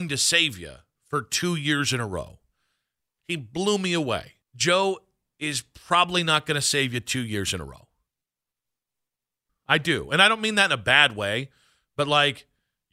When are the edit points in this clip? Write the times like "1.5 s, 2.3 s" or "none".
3.2 s, 4.4 s, 9.5 s